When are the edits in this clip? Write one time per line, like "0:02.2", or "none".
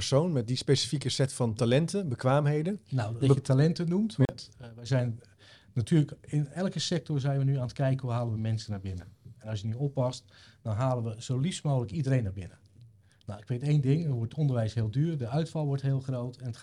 0:03.2